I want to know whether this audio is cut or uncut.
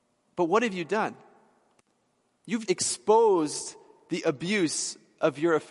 cut